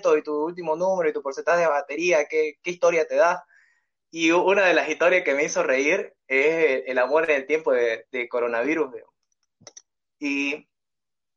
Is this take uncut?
yes; 0 cuts

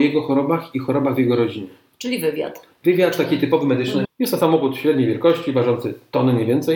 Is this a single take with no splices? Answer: no; 1 cut; at 4.0 s

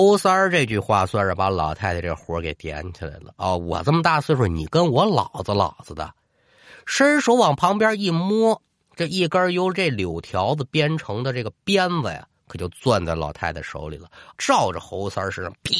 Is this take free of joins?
no; 1 cut; at 14.4 s

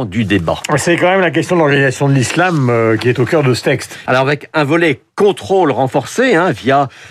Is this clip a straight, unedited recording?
no; 1 cut; at 4.1 s

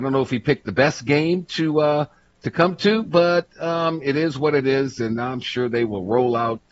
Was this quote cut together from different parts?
no; 0 cuts

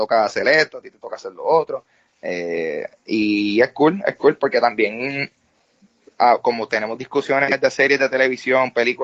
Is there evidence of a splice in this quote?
no; 0 cuts

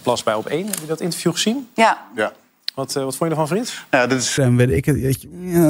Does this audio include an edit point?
yes; 1 cut; at 4.4 s

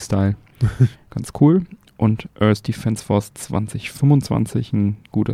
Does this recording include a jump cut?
yes; 1 cut; at 0.9 s

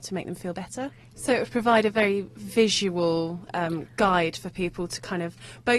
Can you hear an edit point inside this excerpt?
yes; 1 cut; at 1.1 s

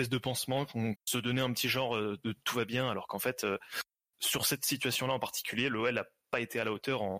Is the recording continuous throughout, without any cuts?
no; 1 cut; at 1.0 s

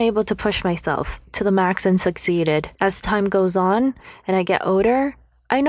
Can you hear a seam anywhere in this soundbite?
yes; 1 cut; at 2.8 s

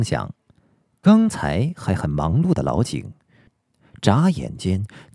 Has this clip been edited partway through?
no; 0 cuts

